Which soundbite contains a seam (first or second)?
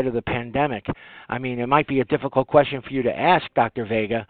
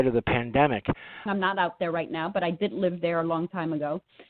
second